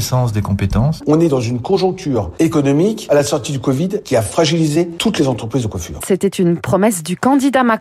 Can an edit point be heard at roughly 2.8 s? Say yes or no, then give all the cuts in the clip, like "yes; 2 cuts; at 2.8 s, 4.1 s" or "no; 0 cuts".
no; 2 cuts; at 1.0 s, 6.0 s